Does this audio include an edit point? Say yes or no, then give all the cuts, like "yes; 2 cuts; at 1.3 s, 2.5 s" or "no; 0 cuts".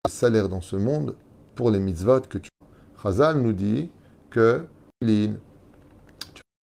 no; 0 cuts